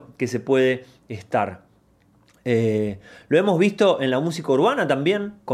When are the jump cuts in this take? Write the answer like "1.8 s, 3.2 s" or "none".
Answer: none